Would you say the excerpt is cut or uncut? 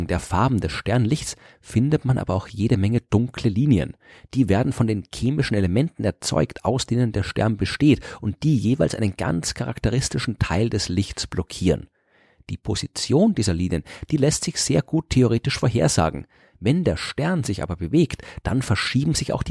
uncut